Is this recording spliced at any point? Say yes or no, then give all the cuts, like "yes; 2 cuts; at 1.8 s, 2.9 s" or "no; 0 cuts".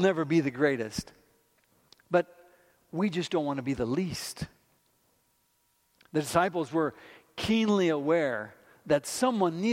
no; 0 cuts